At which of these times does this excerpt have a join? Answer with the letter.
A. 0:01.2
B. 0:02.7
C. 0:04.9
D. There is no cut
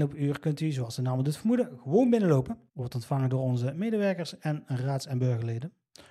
B